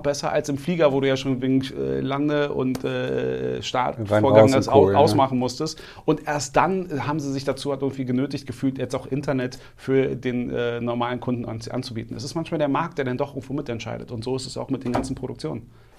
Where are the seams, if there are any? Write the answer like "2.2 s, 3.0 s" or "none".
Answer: none